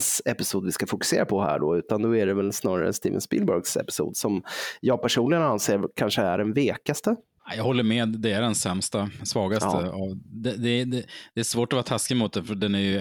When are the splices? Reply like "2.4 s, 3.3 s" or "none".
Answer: none